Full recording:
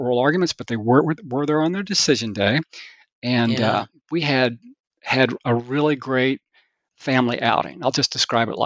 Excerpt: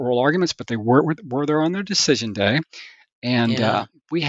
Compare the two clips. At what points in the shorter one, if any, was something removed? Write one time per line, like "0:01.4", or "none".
none